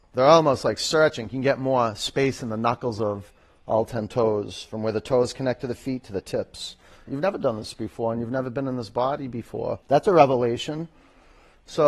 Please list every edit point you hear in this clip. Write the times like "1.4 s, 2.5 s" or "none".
7.1 s, 9.8 s

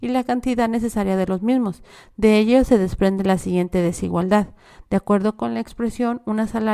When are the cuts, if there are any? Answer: none

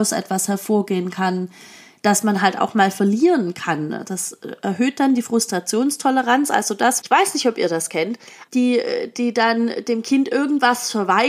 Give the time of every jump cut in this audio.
7.0 s, 8.5 s

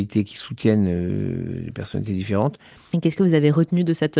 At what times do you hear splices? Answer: 2.9 s

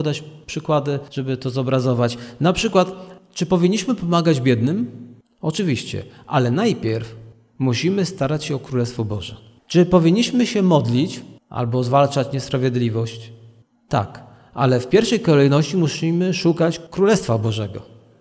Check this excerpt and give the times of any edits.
11.4 s

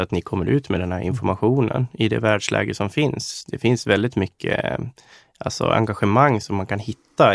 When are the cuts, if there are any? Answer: none

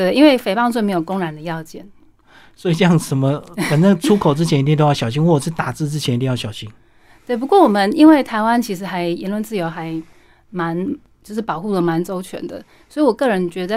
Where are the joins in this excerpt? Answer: none

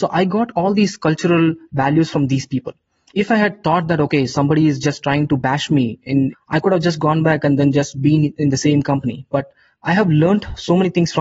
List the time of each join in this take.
3.1 s, 6.3 s

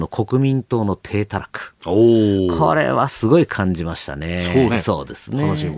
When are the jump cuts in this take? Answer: 4.7 s

